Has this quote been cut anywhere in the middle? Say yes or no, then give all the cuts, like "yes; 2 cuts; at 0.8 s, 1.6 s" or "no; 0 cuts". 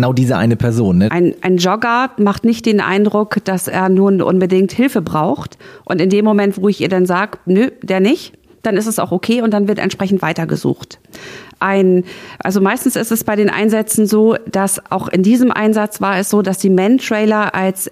yes; 1 cut; at 1.1 s